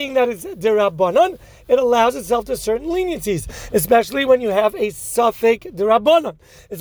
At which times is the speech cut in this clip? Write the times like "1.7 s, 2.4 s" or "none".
none